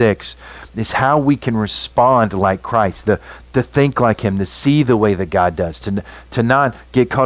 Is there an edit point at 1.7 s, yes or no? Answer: no